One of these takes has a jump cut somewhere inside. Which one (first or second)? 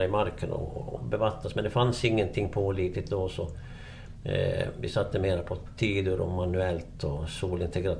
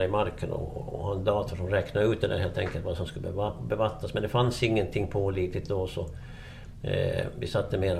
first